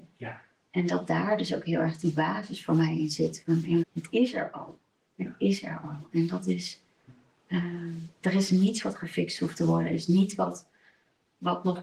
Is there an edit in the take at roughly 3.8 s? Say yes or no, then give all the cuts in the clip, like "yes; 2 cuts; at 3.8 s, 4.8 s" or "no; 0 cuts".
yes; 1 cut; at 3.8 s